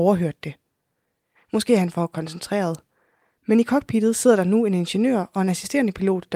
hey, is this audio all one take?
no; 1 cut; at 1.3 s

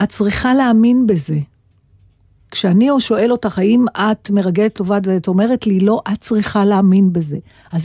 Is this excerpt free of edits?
yes; 0 cuts

